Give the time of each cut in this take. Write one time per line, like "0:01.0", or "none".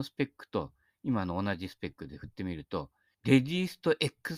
0:03.1